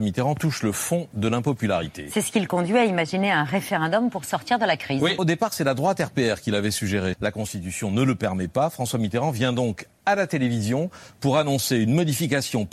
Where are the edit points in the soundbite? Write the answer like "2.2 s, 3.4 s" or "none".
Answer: 5.2 s, 7.1 s